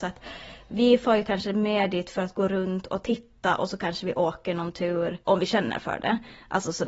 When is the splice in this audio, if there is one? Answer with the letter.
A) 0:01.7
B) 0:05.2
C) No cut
B